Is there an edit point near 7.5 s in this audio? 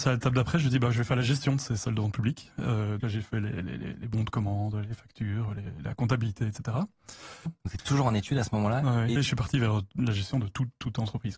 yes; 3 cuts; at 3.0 s, 7.5 s, 9.2 s

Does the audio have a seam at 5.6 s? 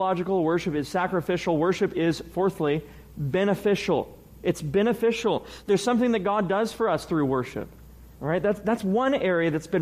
no; 1 cut; at 8.1 s

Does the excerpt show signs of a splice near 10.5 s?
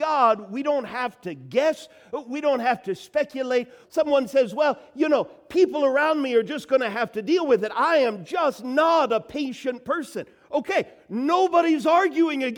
no; 1 cut; at 3.8 s

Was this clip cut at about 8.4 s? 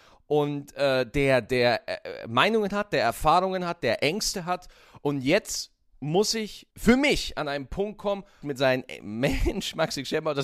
yes; 3 cuts; at 3.8 s, 6.7 s, 8.4 s

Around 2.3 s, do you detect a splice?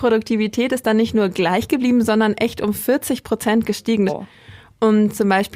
no; 1 cut; at 4.1 s

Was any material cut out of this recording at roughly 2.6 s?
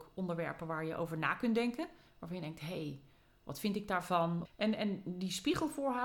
no; 1 cut; at 4.5 s

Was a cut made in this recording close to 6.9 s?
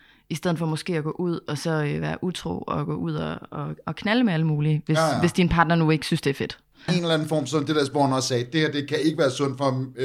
yes; 1 cut; at 6.9 s

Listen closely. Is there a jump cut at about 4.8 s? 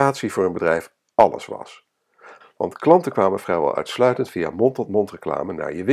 no; 1 cut; at 2.4 s

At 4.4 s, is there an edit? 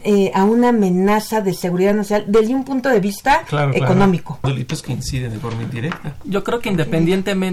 yes; 1 cut; at 4.4 s

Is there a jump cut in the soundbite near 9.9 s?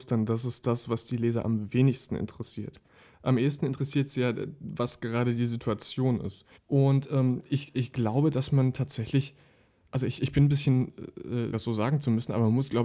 no; 2 cuts; at 6.5 s, 11.5 s

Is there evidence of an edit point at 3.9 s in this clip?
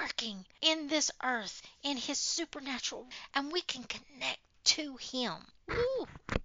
no; 0 cuts

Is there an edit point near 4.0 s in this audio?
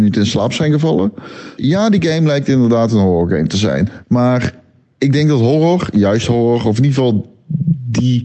yes; 2 cuts; at 1.6 s, 4.0 s

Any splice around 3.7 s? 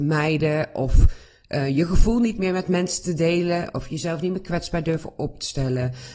yes; 1 cut; at 3.7 s

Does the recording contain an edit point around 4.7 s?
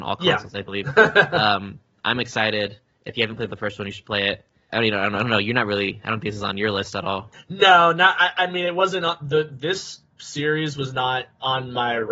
yes; 2 cuts; at 4.7 s, 10.1 s

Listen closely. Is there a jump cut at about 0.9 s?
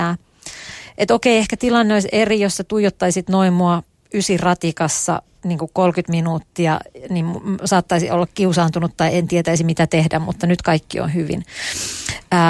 no; 0 cuts

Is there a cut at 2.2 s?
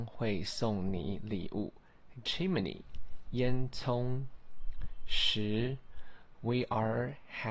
yes; 1 cut; at 2.2 s

